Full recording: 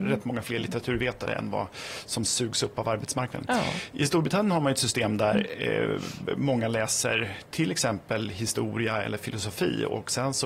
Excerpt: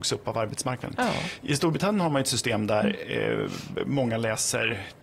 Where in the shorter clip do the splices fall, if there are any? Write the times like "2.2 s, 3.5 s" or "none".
none